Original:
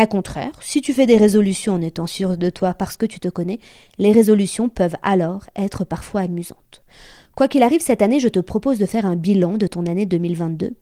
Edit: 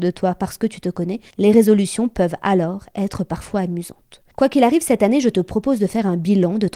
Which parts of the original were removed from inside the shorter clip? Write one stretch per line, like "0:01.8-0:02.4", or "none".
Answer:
0:03.7-0:03.9
0:06.9-0:07.3